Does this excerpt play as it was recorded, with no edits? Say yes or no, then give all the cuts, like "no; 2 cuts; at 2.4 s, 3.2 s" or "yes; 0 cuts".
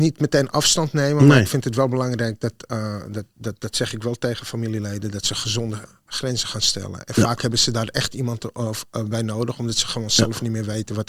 yes; 0 cuts